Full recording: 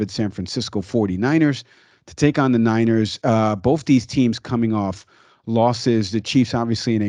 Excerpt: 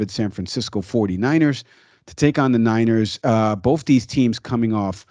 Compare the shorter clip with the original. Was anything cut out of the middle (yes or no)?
no